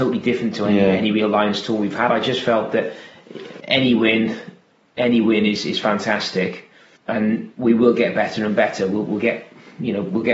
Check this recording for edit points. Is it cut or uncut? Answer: cut